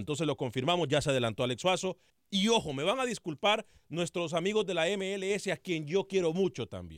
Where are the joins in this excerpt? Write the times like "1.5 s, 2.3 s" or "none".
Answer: 2.1 s

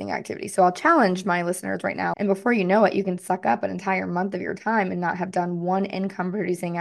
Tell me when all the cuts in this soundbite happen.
2.1 s

